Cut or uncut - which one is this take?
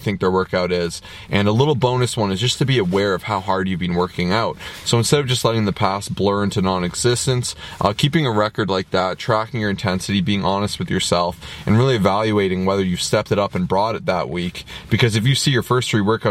uncut